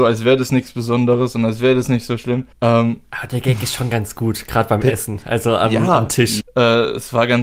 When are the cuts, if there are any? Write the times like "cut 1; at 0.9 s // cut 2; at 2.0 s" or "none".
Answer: cut 1; at 2.5 s // cut 2; at 6.4 s